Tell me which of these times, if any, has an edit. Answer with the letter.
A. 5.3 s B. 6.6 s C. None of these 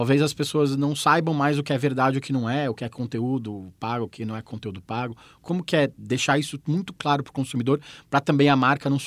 C